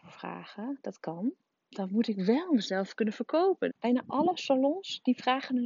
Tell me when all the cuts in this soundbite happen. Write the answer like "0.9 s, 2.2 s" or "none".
1.5 s, 3.7 s